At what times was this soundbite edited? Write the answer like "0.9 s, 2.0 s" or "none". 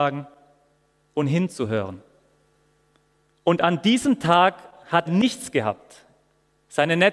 3.3 s, 5.1 s